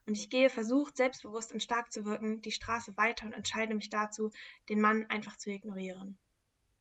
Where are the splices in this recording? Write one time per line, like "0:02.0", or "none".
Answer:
none